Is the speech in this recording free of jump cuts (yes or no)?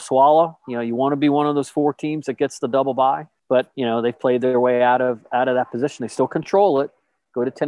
yes